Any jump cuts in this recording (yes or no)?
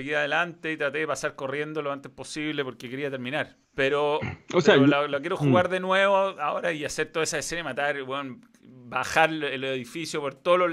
yes